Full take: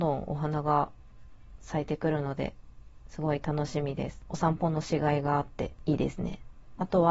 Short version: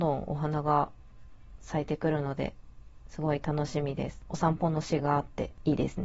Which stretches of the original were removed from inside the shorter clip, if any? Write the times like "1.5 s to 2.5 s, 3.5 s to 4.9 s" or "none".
5.0 s to 5.2 s